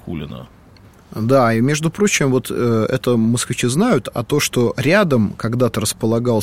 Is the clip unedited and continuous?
yes; 0 cuts

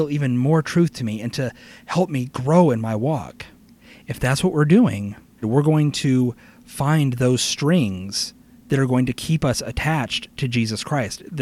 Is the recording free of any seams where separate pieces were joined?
no; 1 cut; at 5.4 s

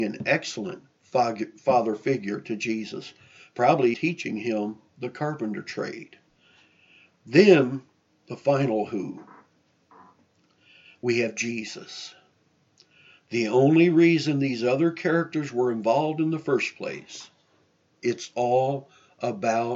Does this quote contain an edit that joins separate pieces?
yes; 1 cut; at 3.9 s

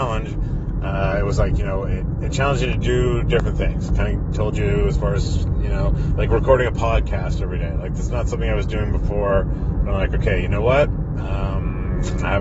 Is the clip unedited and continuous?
yes; 0 cuts

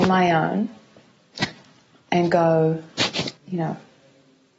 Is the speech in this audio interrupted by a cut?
yes; 1 cut; at 3.4 s

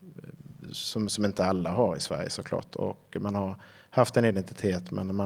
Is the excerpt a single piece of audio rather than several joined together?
yes; 0 cuts

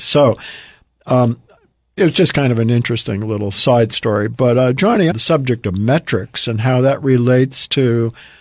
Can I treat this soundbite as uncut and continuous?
no; 1 cut; at 5.1 s

